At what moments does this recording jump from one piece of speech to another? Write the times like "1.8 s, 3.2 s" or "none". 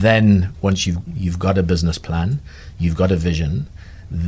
1.1 s